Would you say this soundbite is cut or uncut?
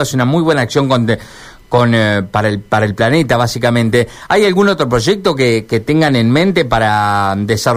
uncut